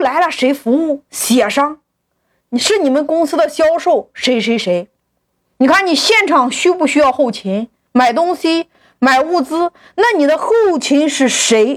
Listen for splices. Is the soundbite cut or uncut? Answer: uncut